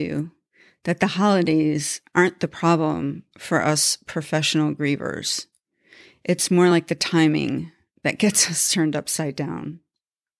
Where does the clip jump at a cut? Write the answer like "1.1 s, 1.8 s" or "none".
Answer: none